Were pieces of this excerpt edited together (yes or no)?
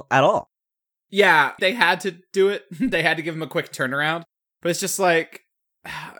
yes